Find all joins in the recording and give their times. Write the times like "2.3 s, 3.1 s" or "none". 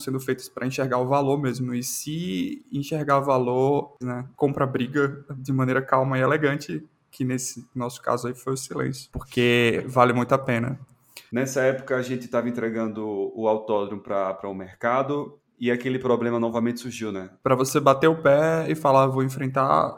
4.0 s, 11.3 s, 17.4 s